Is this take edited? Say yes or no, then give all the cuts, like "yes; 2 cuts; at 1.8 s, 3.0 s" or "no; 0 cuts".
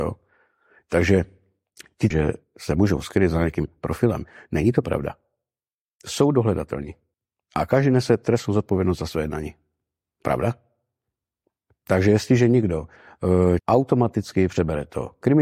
yes; 2 cuts; at 2.1 s, 13.6 s